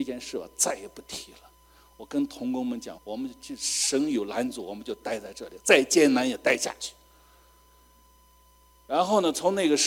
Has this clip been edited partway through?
yes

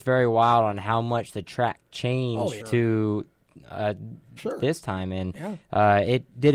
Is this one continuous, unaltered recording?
no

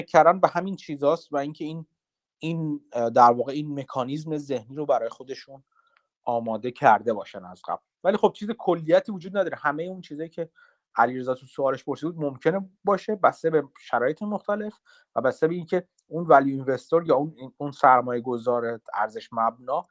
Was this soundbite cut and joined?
no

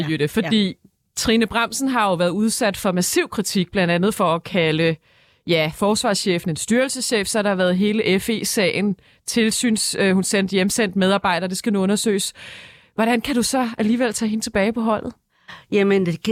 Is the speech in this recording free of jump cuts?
yes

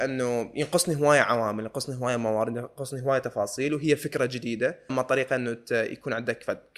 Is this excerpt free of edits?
no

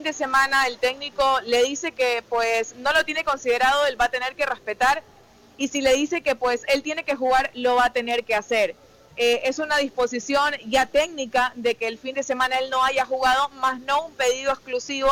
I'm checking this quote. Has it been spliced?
no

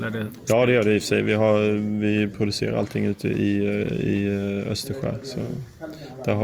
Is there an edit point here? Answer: no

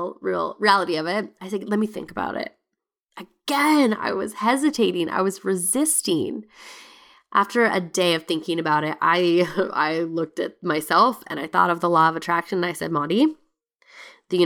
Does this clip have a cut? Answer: no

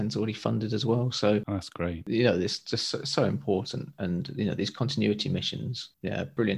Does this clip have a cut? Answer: no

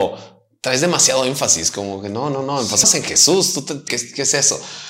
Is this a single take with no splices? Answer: no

